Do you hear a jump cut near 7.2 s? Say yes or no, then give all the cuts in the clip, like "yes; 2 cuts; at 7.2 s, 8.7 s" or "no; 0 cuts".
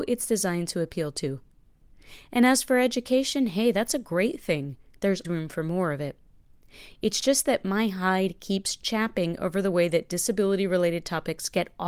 no; 1 cut; at 5.2 s